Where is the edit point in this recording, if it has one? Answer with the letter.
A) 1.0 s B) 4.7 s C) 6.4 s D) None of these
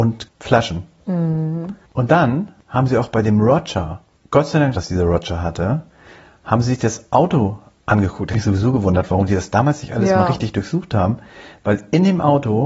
B